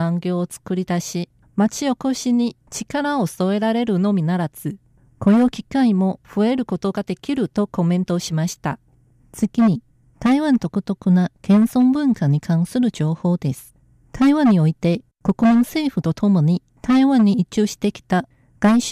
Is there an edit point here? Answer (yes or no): yes